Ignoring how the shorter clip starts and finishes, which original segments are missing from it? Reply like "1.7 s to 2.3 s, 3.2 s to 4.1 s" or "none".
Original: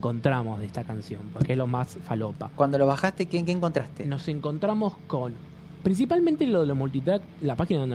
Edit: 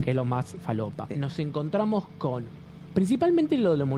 2.5 s to 4.0 s